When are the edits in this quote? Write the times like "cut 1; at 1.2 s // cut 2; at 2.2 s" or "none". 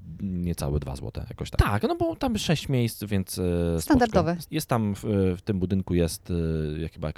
cut 1; at 1.6 s // cut 2; at 4.4 s